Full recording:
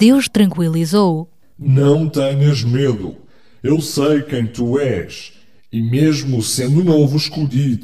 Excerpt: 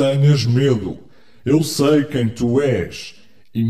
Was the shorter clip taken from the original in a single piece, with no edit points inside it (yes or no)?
yes